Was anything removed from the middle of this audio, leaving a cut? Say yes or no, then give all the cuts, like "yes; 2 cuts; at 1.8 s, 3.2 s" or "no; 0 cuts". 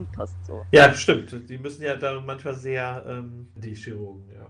yes; 1 cut; at 3.6 s